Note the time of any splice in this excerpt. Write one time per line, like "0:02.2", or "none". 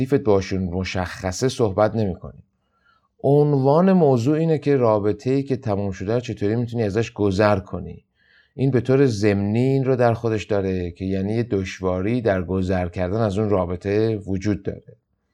none